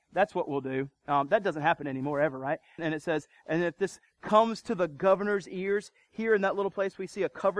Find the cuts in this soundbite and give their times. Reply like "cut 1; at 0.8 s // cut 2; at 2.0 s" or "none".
cut 1; at 2.8 s